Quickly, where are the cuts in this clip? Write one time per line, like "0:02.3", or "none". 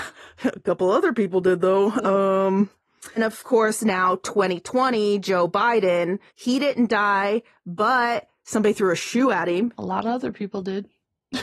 0:03.2
0:06.3